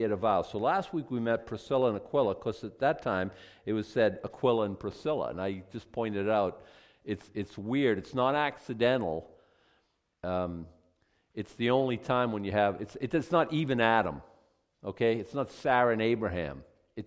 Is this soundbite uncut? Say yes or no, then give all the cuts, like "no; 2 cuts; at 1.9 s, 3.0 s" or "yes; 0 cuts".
yes; 0 cuts